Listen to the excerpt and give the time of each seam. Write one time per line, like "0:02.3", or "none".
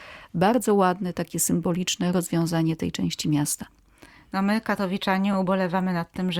none